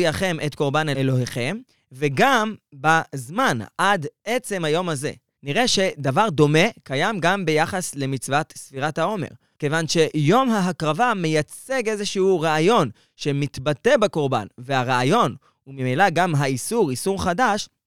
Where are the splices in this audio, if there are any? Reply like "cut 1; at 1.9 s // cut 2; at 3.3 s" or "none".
cut 1; at 5.3 s // cut 2; at 9.5 s